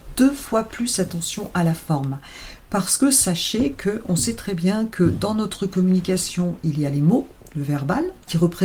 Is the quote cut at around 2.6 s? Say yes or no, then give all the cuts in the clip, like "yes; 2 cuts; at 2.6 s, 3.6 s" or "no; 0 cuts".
no; 0 cuts